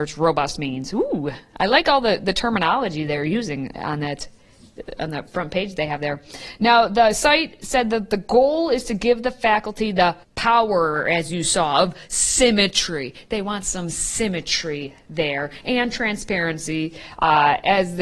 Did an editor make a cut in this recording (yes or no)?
yes